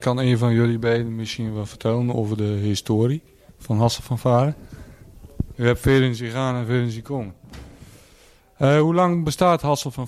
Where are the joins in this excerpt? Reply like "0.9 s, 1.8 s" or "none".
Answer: 5.5 s